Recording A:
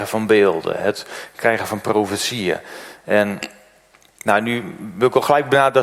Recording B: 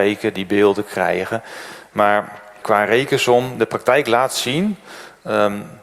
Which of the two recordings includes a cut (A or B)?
B